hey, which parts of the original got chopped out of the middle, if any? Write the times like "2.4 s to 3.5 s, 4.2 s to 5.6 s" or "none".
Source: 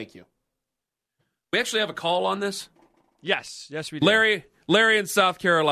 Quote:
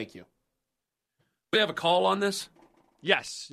1.5 s to 1.7 s

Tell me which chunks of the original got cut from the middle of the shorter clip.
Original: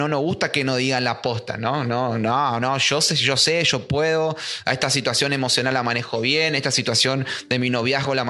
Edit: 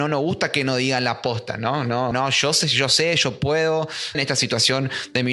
2.1 s to 2.6 s, 4.6 s to 6.5 s

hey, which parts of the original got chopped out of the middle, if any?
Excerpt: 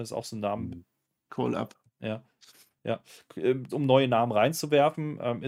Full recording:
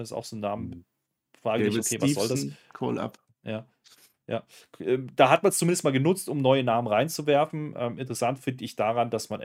1.3 s to 2.7 s, 5.1 s to 6.2 s

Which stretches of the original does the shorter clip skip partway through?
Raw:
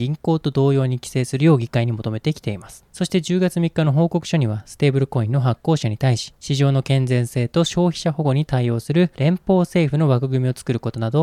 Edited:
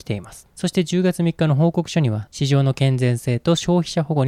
4.6 s to 6.4 s

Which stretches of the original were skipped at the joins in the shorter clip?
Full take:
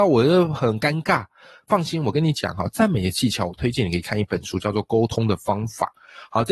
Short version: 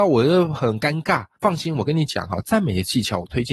1.3 s to 1.6 s

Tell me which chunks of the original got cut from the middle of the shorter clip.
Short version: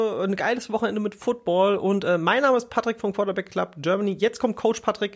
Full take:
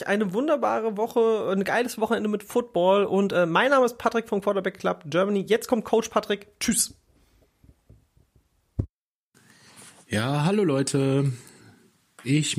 none

